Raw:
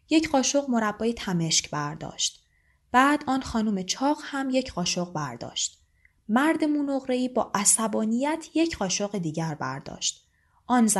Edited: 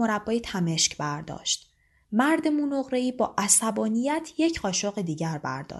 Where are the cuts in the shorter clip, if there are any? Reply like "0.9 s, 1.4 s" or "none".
2.0 s